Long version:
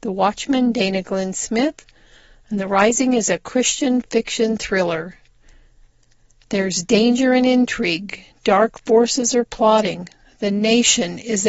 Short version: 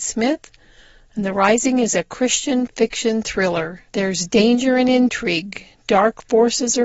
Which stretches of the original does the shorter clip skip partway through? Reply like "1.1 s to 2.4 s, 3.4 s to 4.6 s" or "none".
5.2 s to 6.5 s